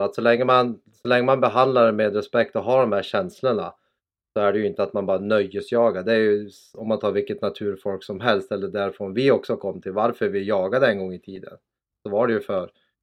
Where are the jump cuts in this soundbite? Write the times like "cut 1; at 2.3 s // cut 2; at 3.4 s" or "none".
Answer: none